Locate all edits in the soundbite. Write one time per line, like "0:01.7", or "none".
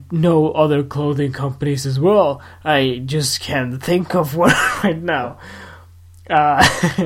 none

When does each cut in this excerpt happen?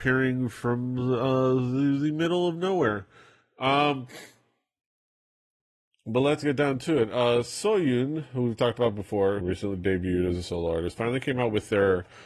0:09.4

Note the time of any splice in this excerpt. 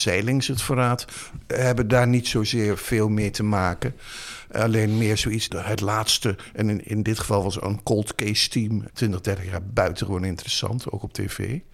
0:05.5
0:08.9

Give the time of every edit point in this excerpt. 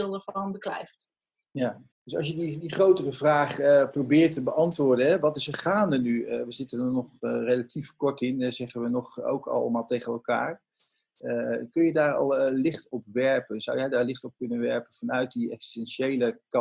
0:01.9

